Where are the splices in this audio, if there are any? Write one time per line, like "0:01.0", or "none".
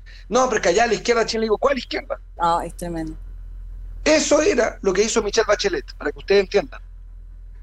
0:02.4